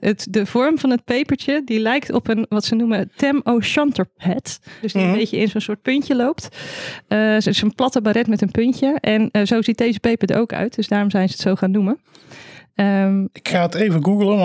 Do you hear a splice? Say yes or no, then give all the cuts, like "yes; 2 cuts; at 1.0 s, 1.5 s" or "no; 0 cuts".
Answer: yes; 1 cut; at 4.8 s